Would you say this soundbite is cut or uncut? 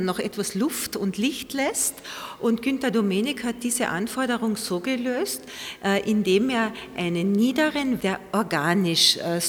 cut